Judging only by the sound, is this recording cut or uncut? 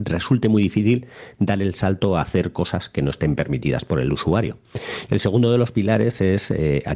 cut